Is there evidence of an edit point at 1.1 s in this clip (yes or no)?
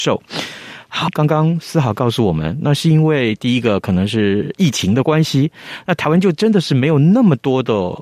yes